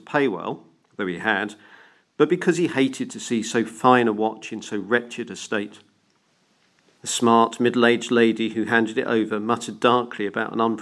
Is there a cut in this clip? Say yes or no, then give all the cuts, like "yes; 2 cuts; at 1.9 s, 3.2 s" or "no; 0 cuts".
yes; 1 cut; at 7.0 s